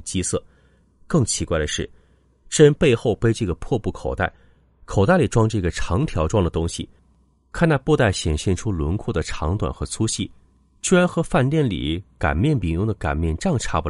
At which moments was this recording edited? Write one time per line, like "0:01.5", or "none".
none